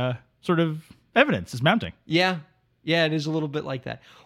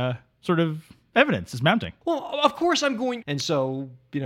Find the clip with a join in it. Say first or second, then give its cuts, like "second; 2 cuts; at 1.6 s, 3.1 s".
second; 2 cuts; at 2.0 s, 3.2 s